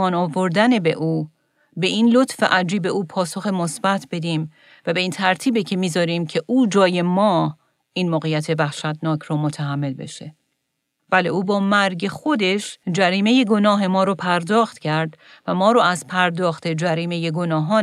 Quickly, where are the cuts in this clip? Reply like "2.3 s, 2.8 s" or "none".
11.0 s, 12.8 s